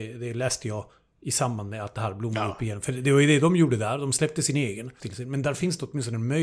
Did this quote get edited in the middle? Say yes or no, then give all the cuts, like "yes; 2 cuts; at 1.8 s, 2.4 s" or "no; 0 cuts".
yes; 1 cut; at 5.0 s